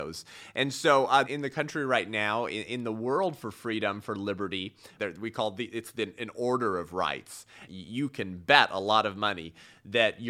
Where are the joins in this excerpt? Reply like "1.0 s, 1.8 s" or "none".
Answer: 1.2 s, 5.0 s, 7.7 s